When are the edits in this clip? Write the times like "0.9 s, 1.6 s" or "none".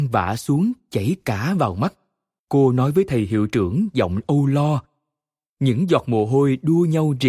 2.4 s, 5.5 s